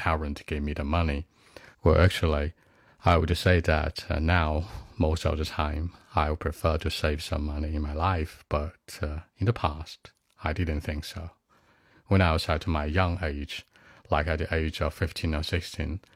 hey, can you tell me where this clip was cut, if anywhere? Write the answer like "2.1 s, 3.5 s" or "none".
1.7 s